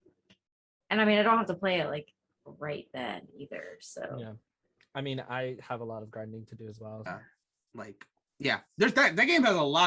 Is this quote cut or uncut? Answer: cut